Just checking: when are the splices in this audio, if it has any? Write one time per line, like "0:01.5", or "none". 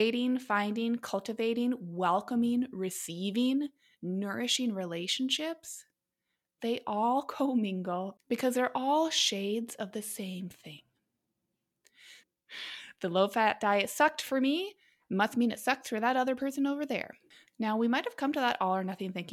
0:12.2
0:17.5